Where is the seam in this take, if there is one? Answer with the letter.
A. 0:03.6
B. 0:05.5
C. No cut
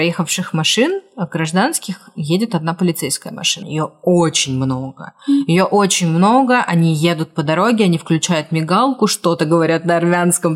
A